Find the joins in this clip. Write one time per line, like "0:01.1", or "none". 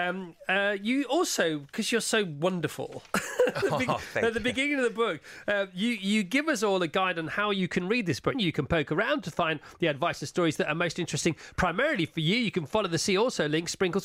0:08.3